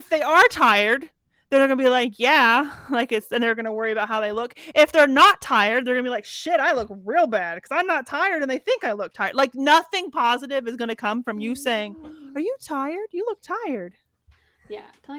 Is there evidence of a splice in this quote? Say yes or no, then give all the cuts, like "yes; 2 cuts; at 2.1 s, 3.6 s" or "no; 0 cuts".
no; 0 cuts